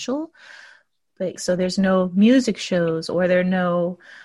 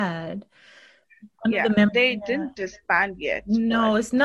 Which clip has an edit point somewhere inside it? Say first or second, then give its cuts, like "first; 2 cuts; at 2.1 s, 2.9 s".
first; 1 cut; at 1.4 s